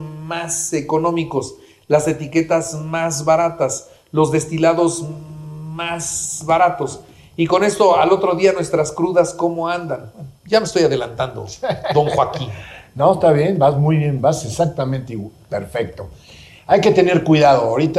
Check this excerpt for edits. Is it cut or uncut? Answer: uncut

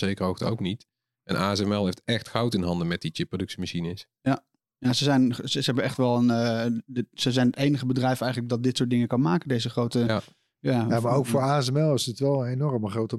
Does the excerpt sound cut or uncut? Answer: uncut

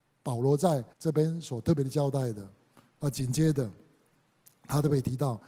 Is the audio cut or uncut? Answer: cut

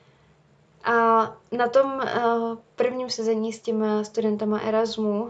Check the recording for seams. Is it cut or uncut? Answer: uncut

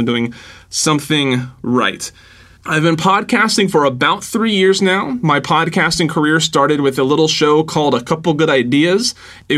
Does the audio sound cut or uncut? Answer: uncut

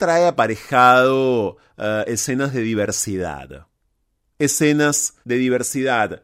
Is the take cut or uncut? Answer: cut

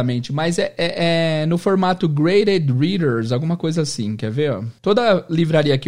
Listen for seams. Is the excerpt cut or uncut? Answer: cut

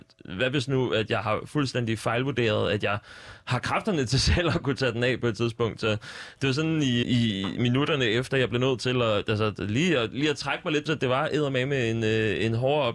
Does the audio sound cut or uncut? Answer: cut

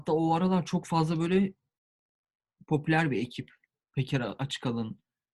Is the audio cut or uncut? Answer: uncut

